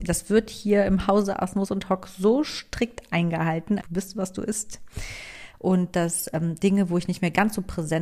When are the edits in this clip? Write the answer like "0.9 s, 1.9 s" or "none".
3.8 s, 5.5 s